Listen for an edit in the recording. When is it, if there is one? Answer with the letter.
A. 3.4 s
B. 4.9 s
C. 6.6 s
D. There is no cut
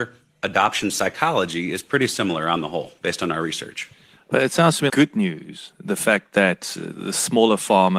B